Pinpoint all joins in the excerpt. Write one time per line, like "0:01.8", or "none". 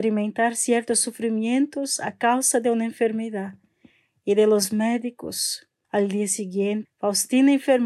0:05.8
0:06.9